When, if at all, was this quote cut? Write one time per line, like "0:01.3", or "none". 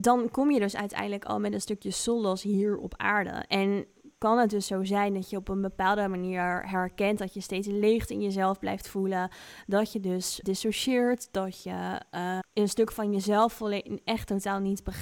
0:10.4
0:12.4